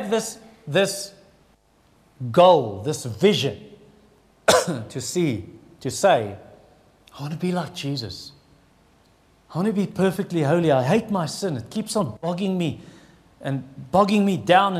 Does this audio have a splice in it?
no; 0 cuts

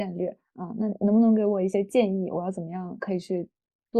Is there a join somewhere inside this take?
no; 0 cuts

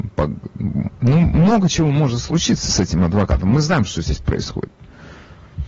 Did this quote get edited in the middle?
no; 0 cuts

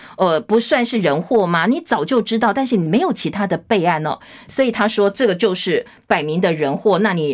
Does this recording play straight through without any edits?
yes; 0 cuts

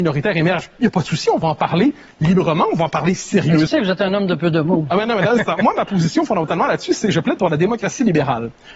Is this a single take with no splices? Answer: no; 1 cut; at 3.7 s

